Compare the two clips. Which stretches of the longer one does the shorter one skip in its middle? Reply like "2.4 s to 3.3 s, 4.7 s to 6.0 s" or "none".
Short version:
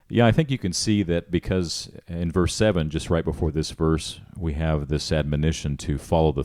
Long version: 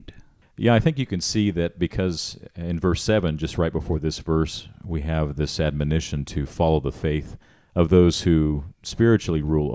none